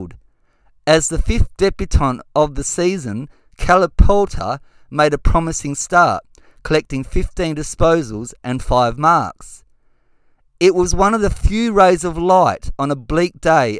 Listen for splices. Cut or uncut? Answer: uncut